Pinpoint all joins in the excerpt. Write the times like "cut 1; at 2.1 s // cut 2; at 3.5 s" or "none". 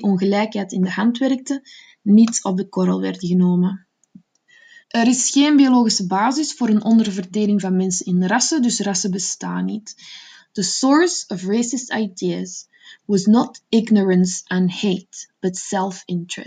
cut 1; at 4.8 s // cut 2; at 10.4 s